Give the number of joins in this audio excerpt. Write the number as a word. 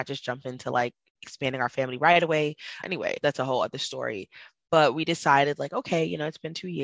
one